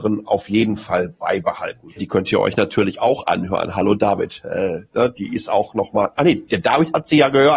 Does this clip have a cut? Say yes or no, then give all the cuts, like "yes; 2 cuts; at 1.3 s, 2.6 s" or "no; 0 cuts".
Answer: yes; 1 cut; at 2.0 s